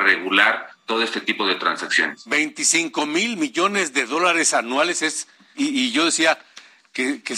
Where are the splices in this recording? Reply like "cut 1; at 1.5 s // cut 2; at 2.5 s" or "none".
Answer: cut 1; at 5.5 s